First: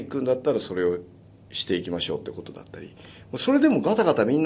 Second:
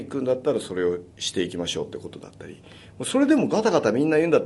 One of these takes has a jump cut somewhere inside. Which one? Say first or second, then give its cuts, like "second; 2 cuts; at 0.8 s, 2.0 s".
second; 1 cut; at 1.1 s